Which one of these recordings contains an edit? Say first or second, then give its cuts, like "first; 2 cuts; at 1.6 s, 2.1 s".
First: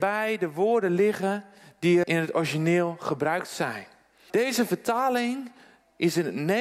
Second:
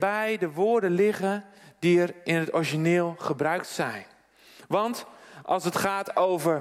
first; 2 cuts; at 2.0 s, 4.3 s